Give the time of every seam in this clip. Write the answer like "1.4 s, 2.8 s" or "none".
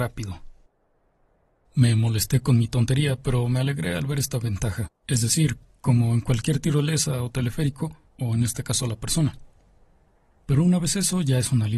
5.0 s, 8.0 s, 10.4 s